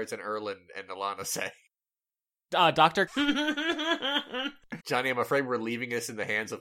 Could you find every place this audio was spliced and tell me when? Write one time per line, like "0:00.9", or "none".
0:03.1
0:04.8